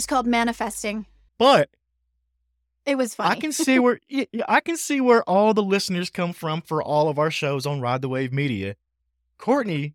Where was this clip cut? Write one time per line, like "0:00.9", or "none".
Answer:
0:01.3